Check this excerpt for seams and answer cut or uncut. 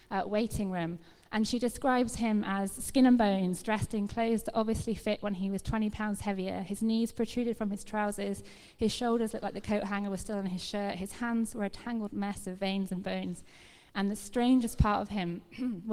uncut